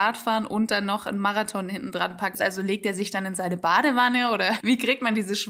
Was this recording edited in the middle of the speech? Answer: yes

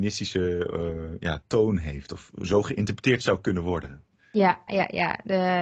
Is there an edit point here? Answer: yes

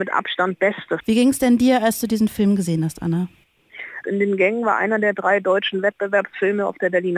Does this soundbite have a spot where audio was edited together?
yes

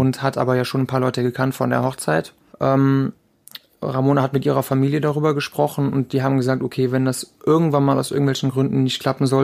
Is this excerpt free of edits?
no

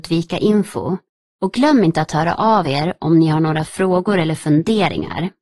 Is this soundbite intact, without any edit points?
yes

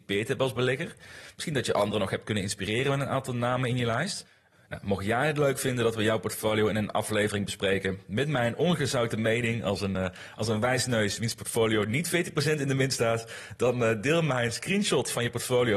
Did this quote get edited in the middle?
no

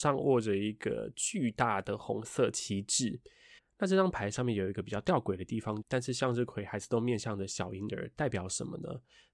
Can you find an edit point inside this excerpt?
yes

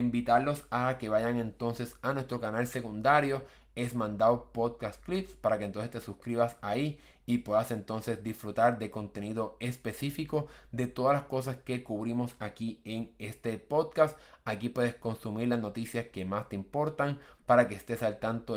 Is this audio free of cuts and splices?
yes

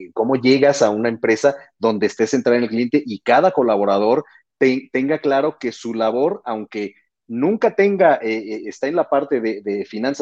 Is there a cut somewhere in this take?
no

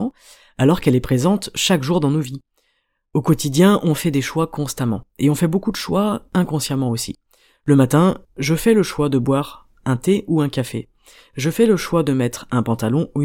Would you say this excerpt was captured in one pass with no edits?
no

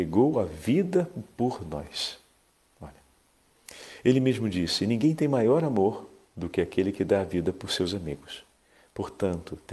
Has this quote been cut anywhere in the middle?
no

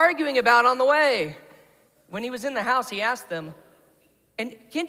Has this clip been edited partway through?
yes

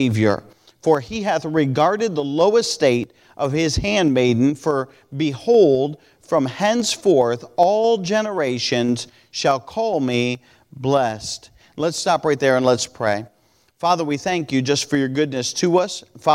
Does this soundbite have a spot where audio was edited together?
no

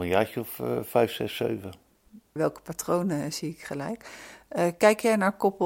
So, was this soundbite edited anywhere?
yes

